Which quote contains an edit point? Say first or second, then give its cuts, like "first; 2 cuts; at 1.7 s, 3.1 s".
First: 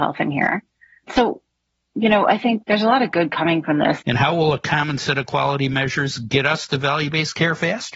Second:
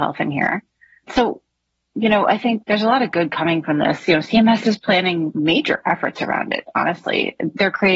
first; 1 cut; at 4.0 s